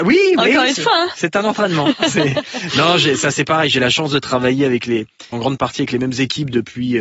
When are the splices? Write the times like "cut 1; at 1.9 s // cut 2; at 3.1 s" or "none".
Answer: cut 1; at 5.3 s